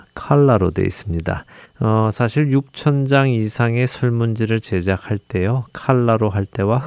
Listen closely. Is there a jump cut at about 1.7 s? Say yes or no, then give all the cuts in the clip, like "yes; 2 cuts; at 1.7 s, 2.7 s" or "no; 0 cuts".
yes; 1 cut; at 1.7 s